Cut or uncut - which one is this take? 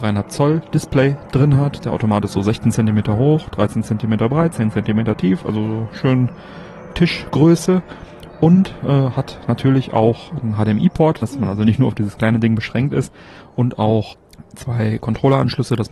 cut